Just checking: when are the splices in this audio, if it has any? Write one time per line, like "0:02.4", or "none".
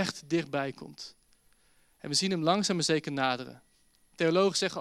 none